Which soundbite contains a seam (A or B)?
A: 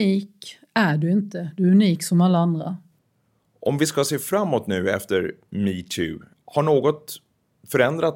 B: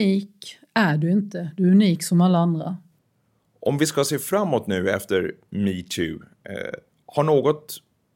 A